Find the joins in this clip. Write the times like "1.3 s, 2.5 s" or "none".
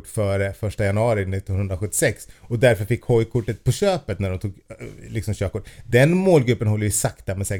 none